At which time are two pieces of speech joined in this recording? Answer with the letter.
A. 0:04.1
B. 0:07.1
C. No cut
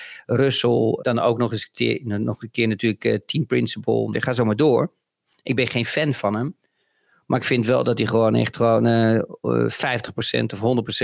A